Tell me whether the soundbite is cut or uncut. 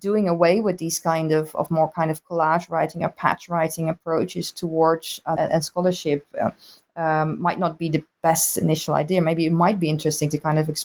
cut